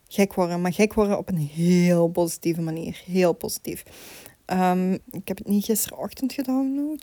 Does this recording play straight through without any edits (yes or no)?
no